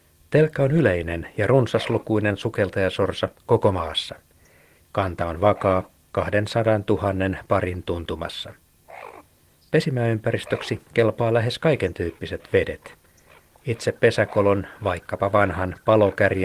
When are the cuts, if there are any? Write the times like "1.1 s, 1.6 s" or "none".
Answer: none